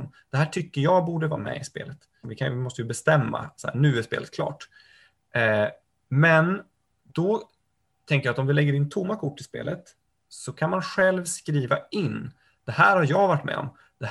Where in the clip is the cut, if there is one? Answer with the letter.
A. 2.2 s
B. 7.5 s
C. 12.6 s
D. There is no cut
A